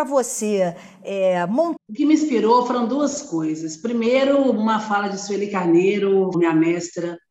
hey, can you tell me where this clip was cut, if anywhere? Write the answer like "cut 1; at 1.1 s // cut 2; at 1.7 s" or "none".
cut 1; at 1.8 s // cut 2; at 6.3 s